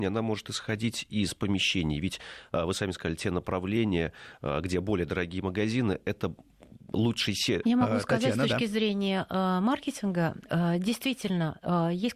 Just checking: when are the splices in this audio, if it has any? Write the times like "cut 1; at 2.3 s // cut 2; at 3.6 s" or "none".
cut 1; at 7.6 s

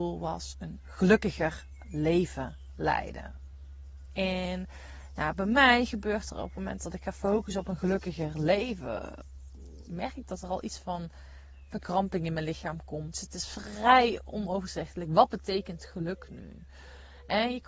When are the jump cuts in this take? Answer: cut 1; at 13.1 s

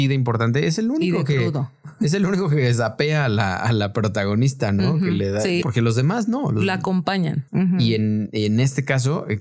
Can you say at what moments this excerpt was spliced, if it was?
cut 1; at 5.6 s // cut 2; at 7.5 s

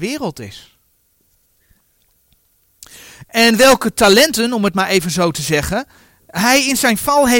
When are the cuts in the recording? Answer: none

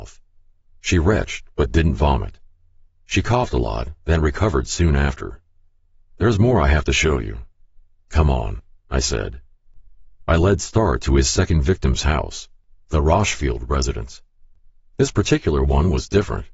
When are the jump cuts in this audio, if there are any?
none

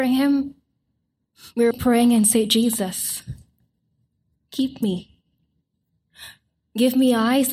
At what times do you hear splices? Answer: cut 1; at 1.7 s

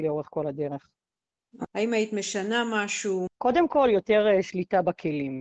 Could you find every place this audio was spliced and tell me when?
cut 1; at 1.7 s // cut 2; at 3.3 s

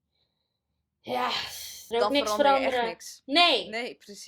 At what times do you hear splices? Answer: cut 1; at 1.9 s

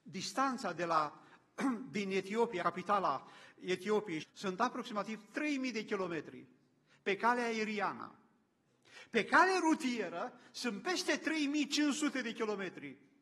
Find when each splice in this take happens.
cut 1; at 2.6 s // cut 2; at 4.2 s

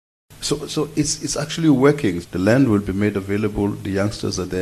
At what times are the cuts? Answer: cut 1; at 2.2 s

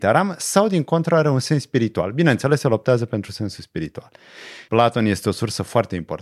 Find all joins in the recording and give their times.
cut 1; at 4.7 s

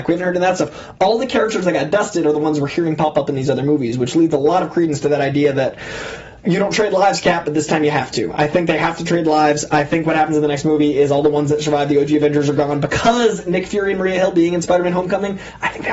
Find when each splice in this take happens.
none

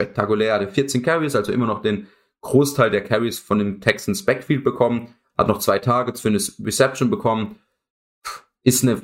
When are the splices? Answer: cut 1; at 5.3 s

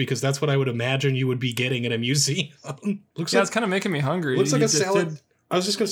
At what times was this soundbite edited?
cut 1; at 3.1 s

